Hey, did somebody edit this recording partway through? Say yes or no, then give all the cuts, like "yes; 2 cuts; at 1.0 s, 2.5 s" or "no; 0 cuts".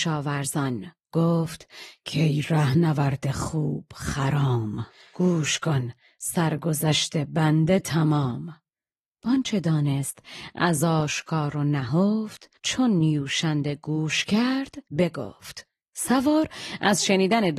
yes; 2 cuts; at 12.6 s, 14.9 s